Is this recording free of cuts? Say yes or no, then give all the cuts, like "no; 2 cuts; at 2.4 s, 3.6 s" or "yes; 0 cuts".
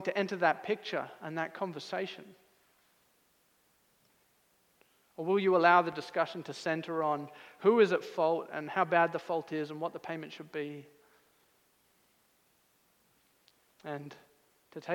no; 1 cut; at 13.7 s